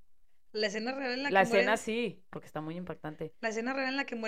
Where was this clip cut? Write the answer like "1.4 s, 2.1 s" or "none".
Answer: 2.3 s